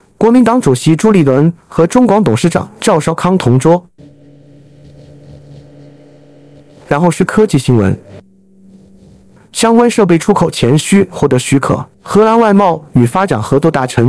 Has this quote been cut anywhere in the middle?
yes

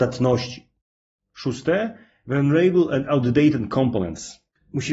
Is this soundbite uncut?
yes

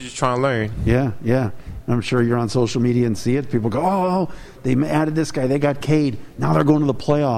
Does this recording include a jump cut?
yes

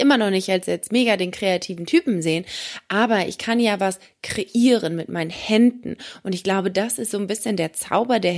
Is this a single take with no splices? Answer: yes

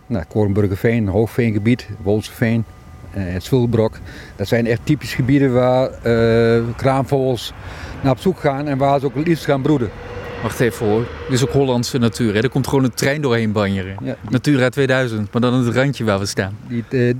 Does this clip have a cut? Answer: no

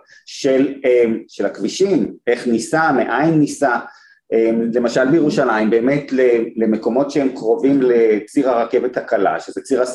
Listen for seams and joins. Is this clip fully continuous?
yes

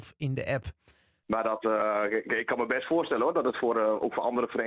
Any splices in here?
yes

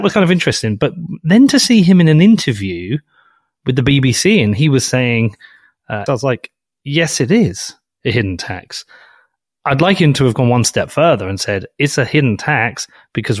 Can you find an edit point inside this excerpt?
yes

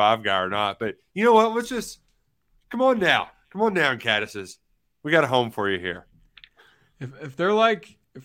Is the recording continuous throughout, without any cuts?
yes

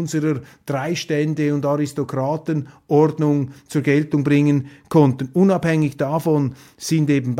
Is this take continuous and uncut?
yes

